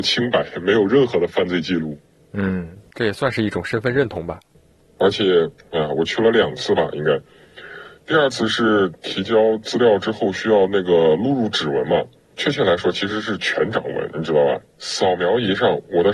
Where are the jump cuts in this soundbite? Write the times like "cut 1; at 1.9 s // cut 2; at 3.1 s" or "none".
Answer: none